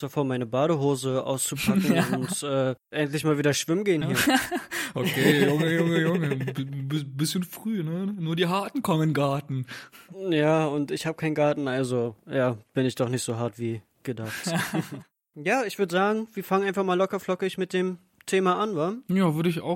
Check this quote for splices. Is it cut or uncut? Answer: uncut